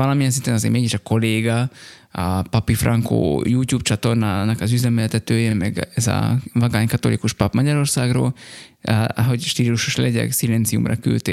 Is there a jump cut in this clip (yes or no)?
no